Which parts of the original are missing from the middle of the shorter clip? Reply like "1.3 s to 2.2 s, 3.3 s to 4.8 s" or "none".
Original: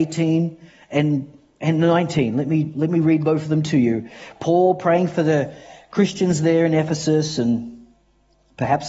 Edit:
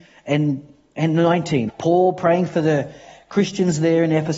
2.3 s to 4.3 s